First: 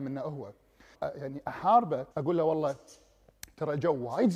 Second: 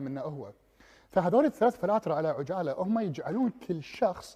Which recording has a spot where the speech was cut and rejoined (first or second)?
first